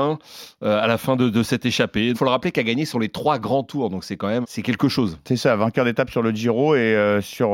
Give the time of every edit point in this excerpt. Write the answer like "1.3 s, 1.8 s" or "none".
2.1 s, 4.4 s